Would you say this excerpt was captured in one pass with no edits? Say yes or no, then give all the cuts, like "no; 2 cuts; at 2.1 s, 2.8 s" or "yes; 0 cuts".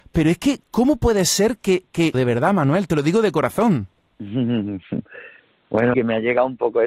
no; 2 cuts; at 2.1 s, 5.9 s